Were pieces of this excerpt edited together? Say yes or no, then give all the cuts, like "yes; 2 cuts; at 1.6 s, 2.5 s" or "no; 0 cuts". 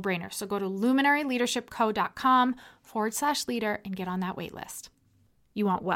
no; 0 cuts